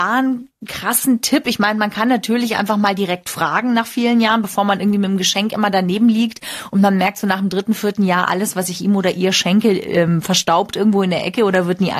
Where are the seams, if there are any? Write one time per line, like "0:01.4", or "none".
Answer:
none